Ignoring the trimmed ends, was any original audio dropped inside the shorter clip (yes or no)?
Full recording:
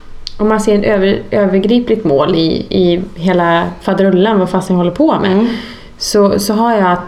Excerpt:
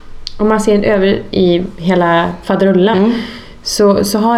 yes